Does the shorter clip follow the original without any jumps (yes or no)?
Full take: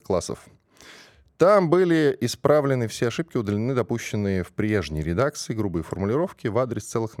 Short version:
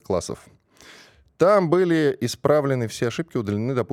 yes